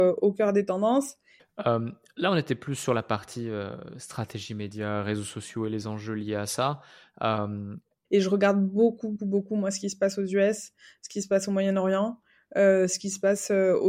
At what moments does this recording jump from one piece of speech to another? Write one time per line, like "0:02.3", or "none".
0:01.4
0:08.0
0:09.2